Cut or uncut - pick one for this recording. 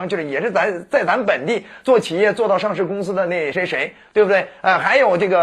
cut